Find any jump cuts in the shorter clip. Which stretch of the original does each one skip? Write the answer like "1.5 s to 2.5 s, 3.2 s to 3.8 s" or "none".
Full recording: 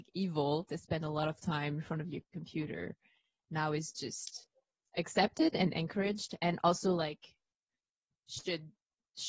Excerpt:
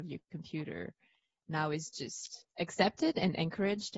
4.5 s to 4.9 s